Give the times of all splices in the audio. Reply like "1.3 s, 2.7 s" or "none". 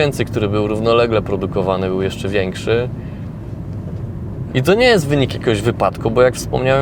4.5 s